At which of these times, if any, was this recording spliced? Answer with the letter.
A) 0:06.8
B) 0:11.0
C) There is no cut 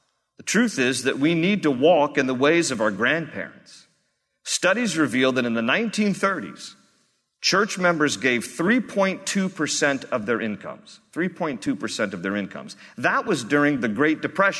C